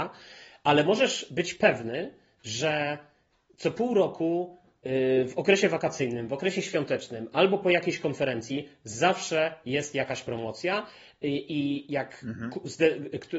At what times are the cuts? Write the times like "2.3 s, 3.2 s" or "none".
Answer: none

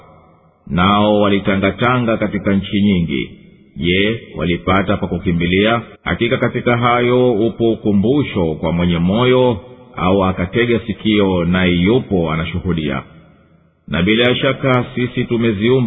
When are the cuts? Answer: 6.0 s

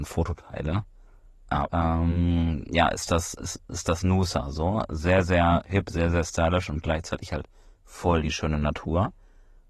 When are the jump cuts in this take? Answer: 1.7 s

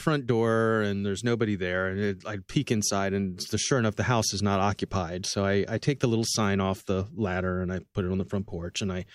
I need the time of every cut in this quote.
none

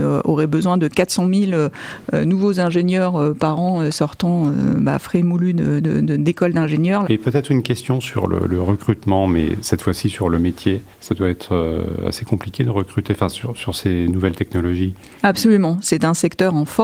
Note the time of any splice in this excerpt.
7.0 s, 10.9 s, 15.2 s

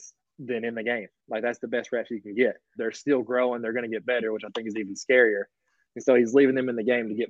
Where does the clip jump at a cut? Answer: 2.8 s

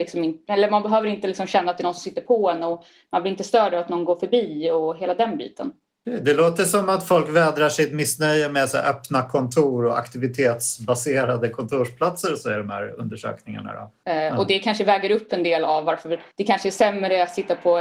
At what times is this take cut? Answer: 14.0 s, 16.3 s

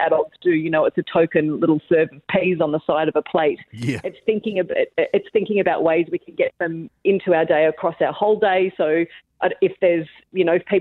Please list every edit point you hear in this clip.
none

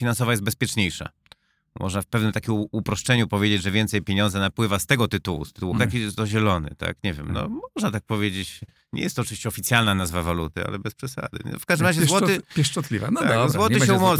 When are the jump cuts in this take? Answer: 5.8 s

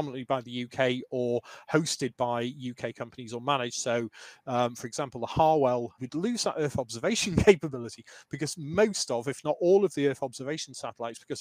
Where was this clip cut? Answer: 6.0 s

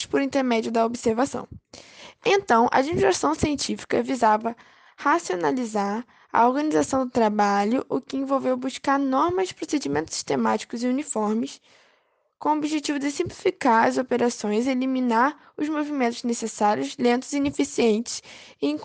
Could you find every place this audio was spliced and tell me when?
none

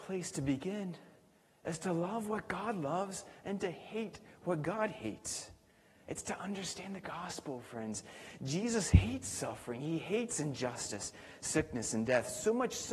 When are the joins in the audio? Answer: none

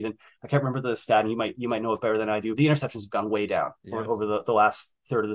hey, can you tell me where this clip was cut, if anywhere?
2.6 s

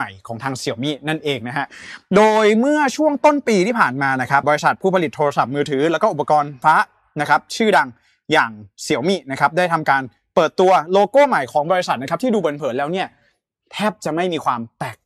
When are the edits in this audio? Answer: 4.4 s, 6.6 s

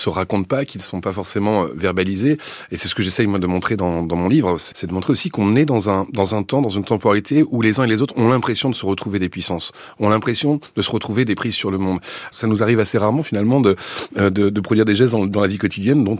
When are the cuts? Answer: 4.7 s, 12.3 s

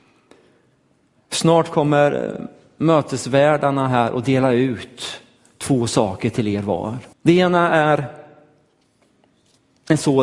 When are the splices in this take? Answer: 7.1 s

